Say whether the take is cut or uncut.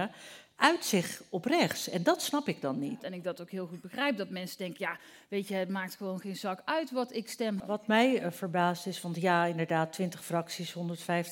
cut